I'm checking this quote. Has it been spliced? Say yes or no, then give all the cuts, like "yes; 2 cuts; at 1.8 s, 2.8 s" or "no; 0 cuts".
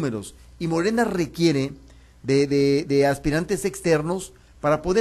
no; 0 cuts